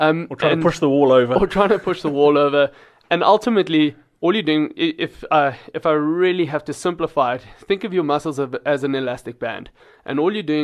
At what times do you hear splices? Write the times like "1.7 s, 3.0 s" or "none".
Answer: none